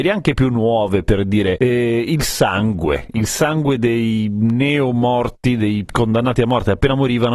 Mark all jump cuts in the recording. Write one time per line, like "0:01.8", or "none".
none